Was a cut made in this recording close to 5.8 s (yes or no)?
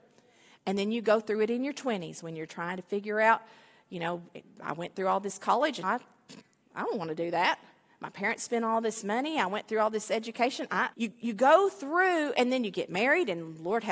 yes